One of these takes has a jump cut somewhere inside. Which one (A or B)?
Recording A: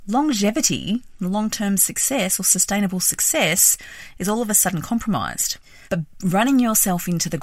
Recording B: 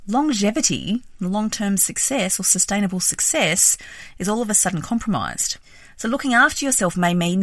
A